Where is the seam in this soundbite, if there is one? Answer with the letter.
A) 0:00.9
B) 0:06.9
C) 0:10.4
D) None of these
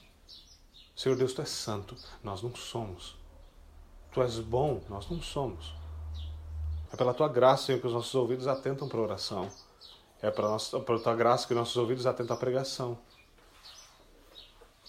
B